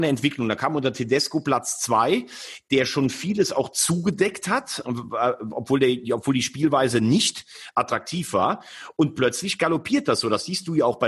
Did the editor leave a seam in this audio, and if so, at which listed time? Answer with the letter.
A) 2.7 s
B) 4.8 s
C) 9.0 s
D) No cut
B